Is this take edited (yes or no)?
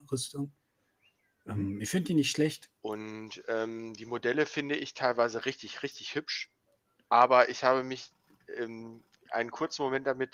yes